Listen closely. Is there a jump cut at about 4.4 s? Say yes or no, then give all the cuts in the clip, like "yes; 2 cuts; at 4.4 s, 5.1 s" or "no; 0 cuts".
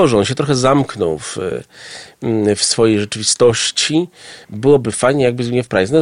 yes; 1 cut; at 4.4 s